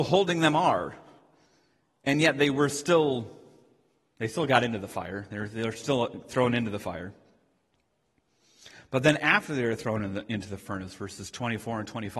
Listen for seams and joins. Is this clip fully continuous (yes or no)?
yes